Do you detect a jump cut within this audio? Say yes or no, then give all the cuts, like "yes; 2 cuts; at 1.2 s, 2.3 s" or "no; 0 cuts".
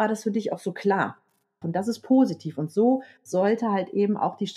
yes; 1 cut; at 1.6 s